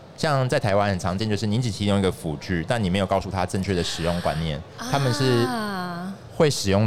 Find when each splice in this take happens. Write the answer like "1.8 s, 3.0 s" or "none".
none